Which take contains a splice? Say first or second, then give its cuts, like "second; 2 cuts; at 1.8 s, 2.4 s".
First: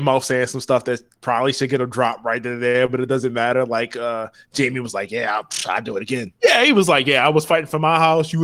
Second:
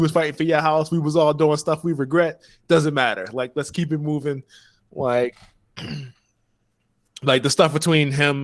first; 1 cut; at 6.4 s